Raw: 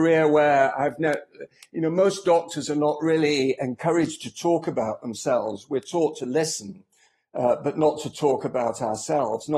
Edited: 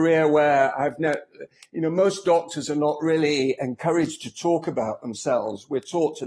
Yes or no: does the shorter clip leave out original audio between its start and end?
no